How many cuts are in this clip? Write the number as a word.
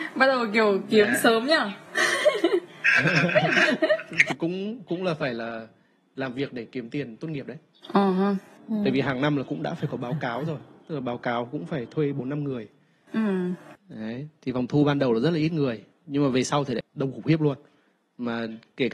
two